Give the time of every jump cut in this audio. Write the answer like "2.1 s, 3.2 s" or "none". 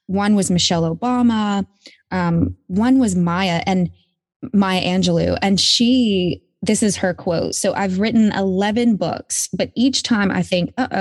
none